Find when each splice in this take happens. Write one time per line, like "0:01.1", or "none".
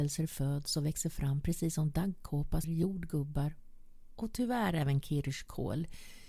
0:02.6

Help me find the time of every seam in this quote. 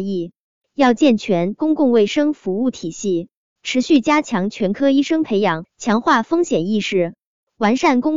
0:03.6
0:05.6

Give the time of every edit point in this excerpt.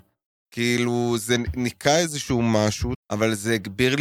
0:02.9

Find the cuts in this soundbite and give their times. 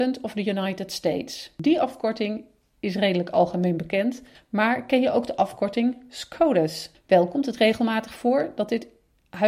0:04.4
0:06.9

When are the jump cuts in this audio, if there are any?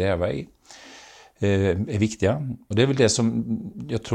0:02.7

